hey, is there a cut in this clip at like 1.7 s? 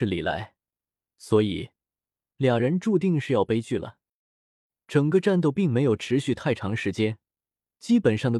no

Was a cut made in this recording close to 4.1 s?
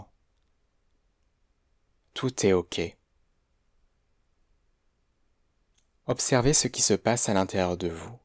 no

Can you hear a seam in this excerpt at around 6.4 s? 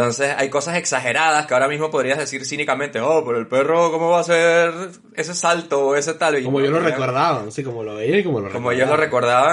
yes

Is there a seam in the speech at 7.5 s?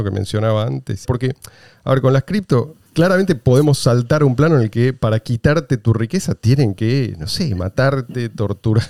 no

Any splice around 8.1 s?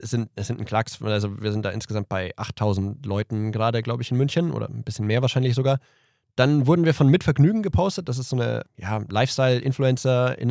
no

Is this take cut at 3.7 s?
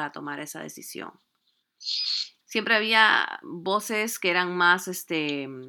no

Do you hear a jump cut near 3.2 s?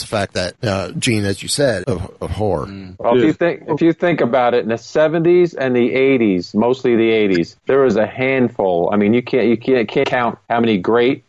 no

